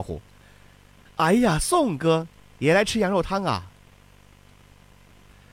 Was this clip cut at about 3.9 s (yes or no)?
yes